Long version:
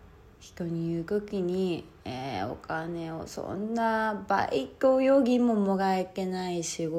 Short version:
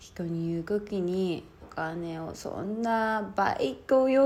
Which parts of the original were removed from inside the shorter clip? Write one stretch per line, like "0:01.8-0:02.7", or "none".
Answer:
0:02.0-0:02.5